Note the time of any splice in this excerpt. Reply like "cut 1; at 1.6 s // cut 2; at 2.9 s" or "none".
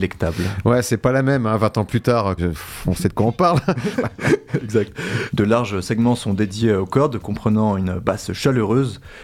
cut 1; at 2.4 s // cut 2; at 3.9 s // cut 3; at 5.3 s